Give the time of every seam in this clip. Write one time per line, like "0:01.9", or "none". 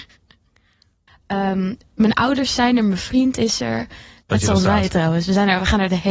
0:01.1
0:04.2